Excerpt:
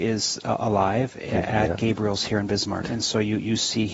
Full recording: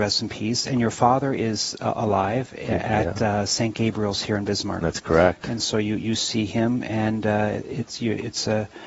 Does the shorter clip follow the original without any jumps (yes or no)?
no